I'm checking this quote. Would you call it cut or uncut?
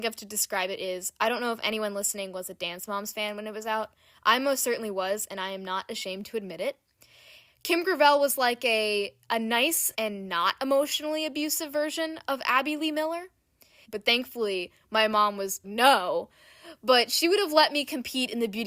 cut